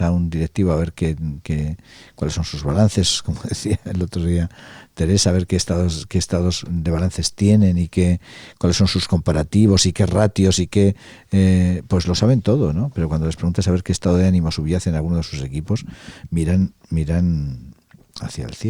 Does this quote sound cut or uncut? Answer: uncut